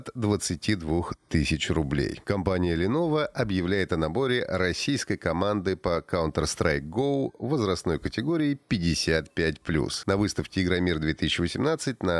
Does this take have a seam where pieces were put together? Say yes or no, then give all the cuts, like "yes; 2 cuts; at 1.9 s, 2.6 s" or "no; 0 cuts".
no; 0 cuts